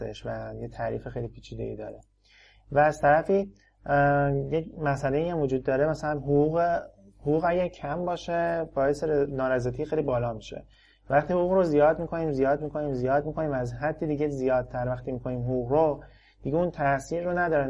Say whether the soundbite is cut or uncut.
uncut